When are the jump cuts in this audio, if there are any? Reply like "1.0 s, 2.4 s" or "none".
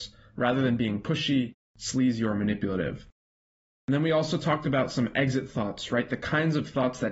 none